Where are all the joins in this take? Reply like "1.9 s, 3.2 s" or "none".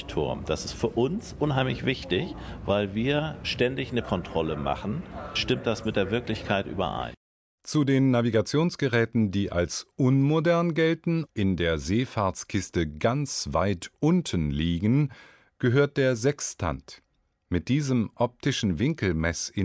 none